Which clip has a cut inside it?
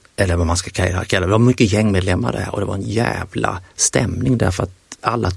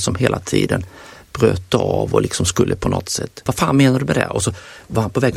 second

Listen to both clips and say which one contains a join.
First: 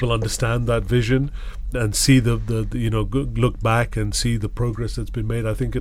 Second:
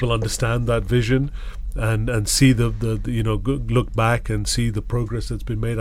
first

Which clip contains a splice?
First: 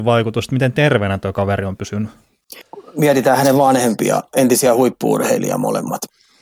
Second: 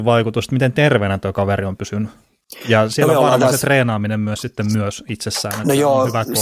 first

